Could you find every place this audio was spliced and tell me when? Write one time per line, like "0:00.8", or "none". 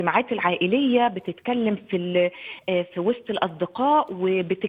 none

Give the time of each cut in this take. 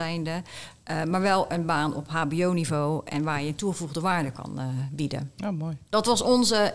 0:05.9

